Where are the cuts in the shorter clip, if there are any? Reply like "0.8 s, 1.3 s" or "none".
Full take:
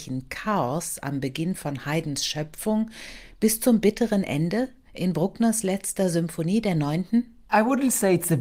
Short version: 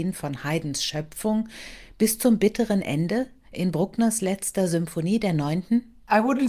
none